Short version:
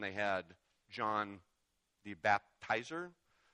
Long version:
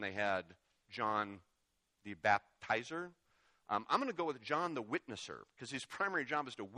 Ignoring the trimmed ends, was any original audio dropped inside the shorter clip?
no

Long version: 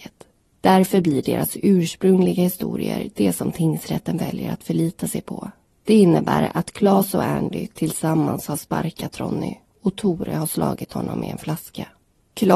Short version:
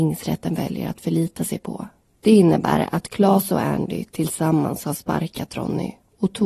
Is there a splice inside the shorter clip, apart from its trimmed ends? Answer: no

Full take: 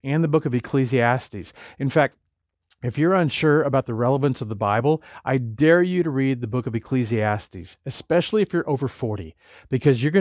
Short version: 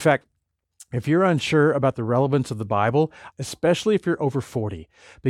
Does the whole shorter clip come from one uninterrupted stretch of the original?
no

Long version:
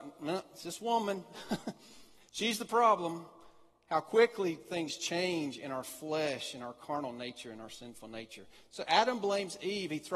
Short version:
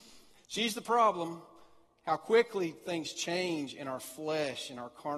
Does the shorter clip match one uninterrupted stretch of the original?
yes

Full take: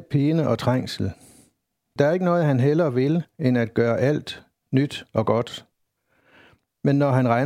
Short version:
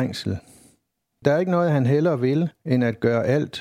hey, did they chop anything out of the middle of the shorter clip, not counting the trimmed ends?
no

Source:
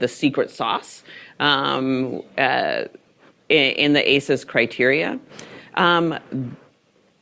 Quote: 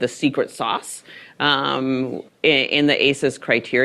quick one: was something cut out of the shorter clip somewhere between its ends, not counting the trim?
yes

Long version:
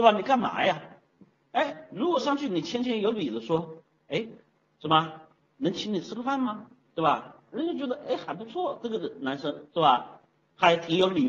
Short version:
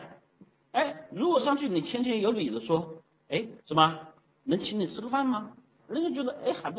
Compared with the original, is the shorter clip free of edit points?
no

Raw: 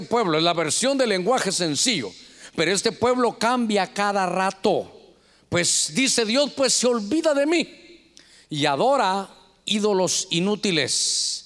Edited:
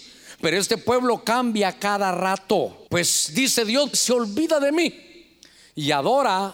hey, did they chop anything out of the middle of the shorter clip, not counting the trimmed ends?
yes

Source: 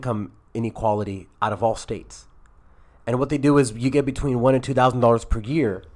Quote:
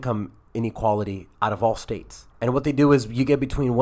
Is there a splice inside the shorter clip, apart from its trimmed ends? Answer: yes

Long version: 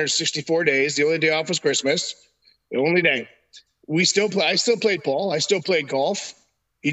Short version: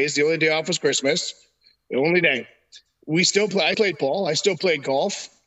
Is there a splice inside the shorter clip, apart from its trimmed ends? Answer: yes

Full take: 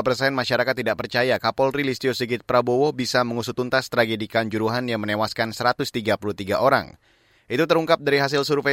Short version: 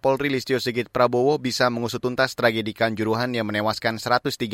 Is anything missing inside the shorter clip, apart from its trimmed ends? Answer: no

